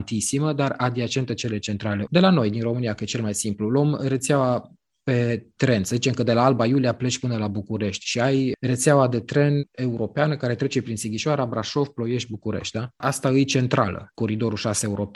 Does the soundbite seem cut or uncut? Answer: cut